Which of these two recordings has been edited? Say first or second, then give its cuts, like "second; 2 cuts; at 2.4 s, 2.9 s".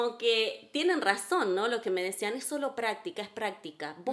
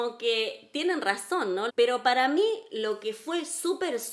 second; 1 cut; at 1.7 s